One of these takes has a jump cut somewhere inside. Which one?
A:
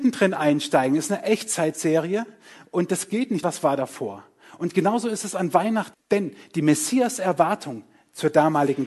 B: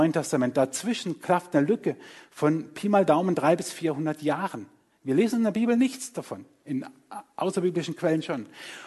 A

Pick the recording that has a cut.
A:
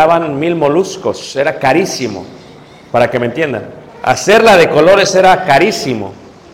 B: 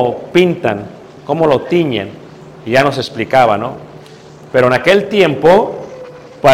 A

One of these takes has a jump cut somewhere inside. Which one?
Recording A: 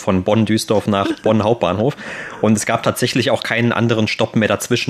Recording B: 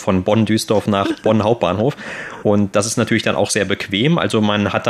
B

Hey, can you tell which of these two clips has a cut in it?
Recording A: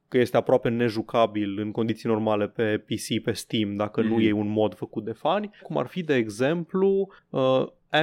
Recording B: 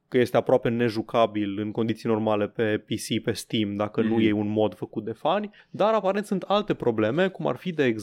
A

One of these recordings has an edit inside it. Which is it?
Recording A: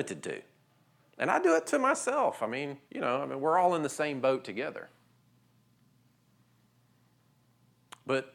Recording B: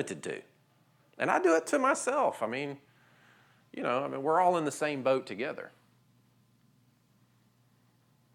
A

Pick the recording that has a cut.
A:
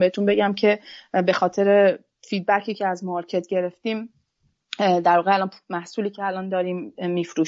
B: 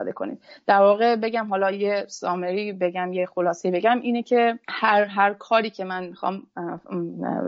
B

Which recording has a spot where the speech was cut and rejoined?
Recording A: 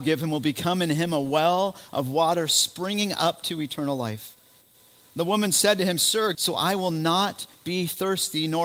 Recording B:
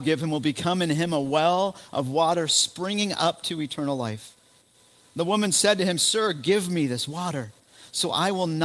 A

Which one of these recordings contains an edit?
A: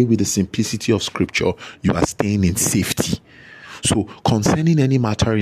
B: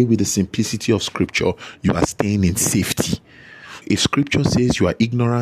B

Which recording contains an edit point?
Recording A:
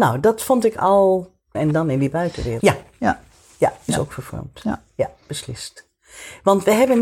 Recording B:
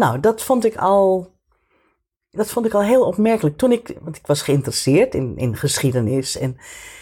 A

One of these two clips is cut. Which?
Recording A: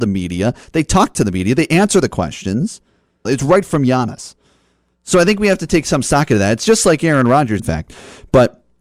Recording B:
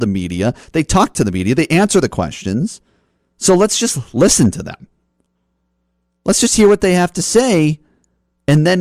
A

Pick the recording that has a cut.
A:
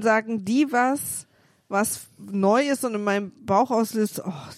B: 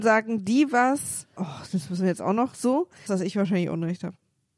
B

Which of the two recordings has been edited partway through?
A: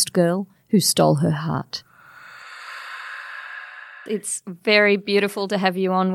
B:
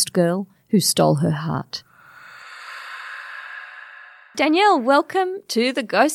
A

